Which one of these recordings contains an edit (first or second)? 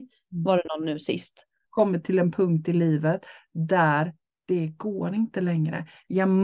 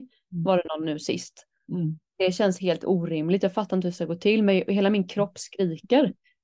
first